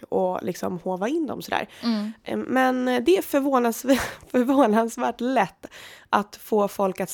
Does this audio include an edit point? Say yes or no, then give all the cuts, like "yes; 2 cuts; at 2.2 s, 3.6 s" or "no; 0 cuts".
no; 0 cuts